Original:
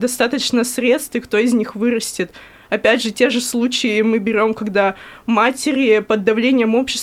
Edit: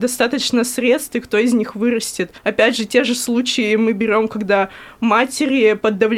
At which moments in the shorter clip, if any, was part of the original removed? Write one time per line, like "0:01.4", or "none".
0:02.4

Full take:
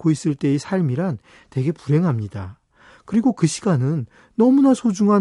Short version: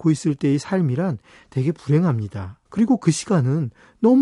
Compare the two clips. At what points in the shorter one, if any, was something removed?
0:02.7

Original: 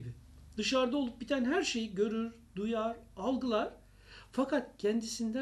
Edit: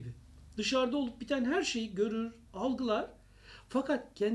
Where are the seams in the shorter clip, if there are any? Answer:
0:02.5

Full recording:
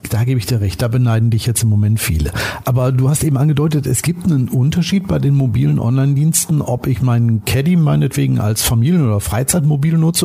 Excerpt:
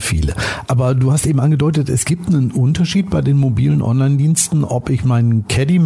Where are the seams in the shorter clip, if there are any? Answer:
none

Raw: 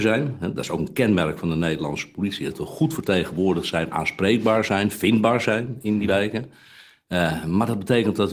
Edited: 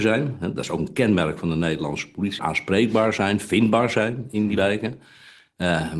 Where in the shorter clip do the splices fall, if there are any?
0:02.4

